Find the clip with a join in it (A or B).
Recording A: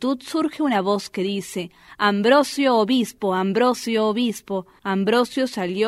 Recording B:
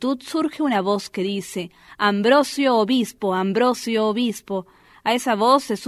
A